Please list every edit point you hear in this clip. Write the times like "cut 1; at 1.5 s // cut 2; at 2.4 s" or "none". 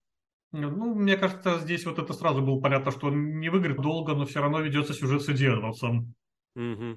cut 1; at 3.8 s